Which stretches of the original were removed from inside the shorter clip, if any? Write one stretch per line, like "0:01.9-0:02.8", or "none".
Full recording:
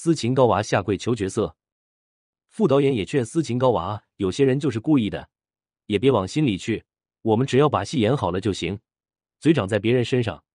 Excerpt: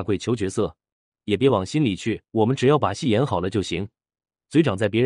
0:01.9-0:05.7
0:06.9-0:07.2